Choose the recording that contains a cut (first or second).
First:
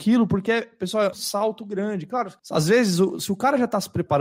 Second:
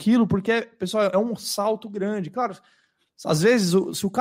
first